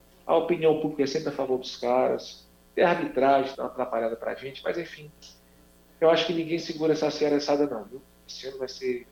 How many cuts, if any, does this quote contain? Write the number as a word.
one